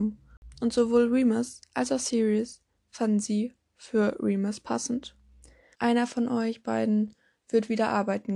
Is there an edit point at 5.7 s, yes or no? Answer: yes